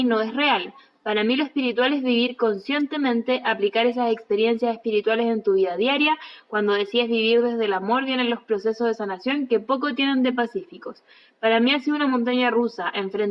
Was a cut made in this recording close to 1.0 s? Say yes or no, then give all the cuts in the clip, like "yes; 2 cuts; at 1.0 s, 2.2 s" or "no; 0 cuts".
no; 0 cuts